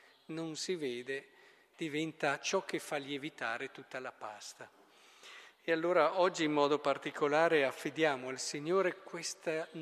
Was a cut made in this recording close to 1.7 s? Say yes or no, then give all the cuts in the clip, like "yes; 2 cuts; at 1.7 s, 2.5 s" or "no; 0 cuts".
yes; 1 cut; at 1.7 s